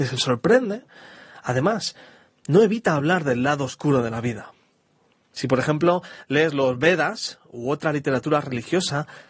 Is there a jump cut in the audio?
yes; 1 cut; at 5.3 s

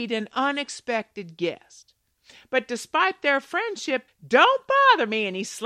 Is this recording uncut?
no; 1 cut; at 4.1 s

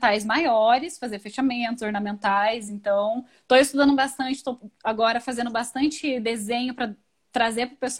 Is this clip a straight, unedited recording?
yes; 0 cuts

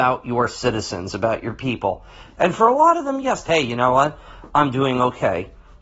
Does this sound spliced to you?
yes; 2 cuts; at 2.3 s, 3.5 s

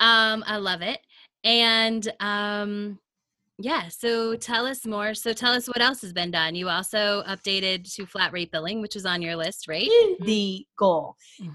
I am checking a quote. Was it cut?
yes; 1 cut; at 10.2 s

